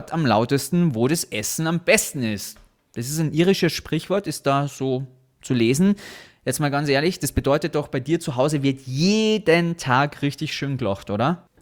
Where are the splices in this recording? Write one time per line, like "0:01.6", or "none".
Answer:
none